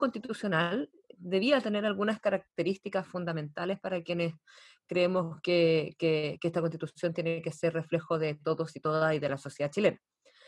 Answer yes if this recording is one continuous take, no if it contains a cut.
yes